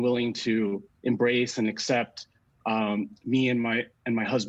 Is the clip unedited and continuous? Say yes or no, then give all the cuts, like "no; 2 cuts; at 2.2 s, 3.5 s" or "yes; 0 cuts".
yes; 0 cuts